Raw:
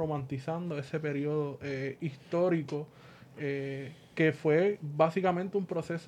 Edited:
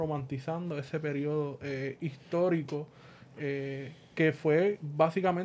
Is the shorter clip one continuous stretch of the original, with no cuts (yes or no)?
yes